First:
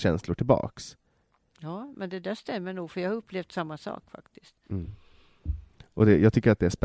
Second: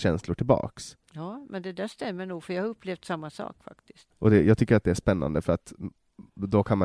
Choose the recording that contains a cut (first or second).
second